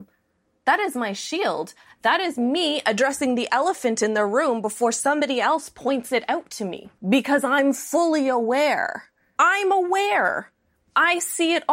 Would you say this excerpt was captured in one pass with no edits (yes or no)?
no